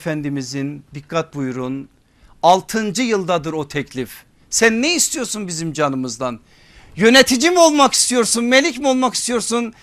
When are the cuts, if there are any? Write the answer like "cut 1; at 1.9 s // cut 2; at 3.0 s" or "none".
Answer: none